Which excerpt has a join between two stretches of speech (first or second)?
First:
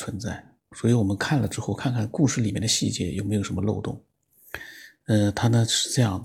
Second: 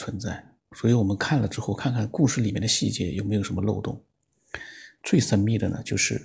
second